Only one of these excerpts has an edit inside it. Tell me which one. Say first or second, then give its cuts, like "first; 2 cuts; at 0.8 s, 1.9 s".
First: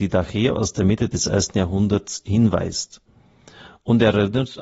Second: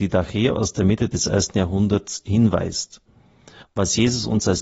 second; 1 cut; at 3.6 s